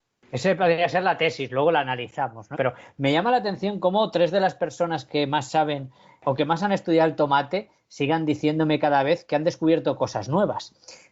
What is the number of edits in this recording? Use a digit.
1